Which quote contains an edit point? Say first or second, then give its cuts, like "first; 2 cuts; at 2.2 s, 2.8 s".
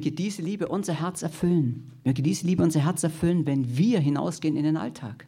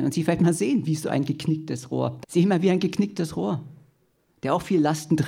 second; 1 cut; at 2.2 s